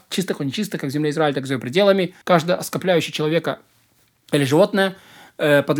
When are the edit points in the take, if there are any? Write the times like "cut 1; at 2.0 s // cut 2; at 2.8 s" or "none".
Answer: cut 1; at 2.2 s